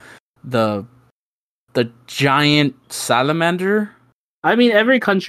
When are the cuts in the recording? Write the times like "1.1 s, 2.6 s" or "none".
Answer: 4.4 s